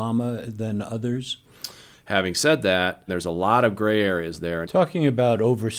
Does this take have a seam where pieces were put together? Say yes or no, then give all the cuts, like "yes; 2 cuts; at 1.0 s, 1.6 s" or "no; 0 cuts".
yes; 3 cuts; at 1.9 s, 3.1 s, 4.6 s